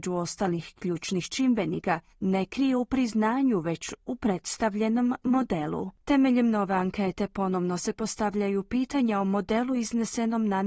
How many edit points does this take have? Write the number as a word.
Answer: two